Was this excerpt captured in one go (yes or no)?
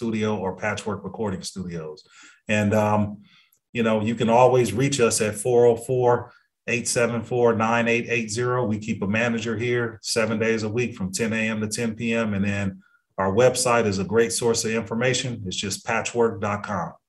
yes